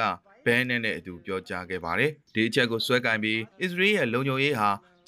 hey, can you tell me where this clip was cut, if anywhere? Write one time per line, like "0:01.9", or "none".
0:03.5